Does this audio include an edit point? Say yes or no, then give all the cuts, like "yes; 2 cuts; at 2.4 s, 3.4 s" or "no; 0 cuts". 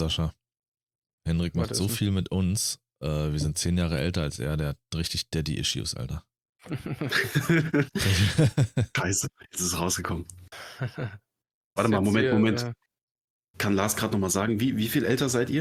yes; 1 cut; at 11.8 s